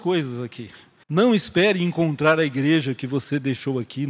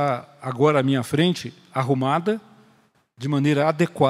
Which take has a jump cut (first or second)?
first